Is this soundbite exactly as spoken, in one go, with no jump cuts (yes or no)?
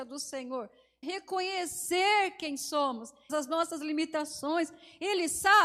no